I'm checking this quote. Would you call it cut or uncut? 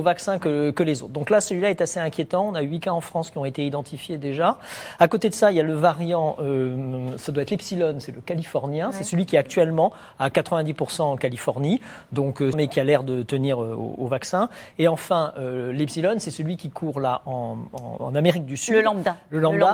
cut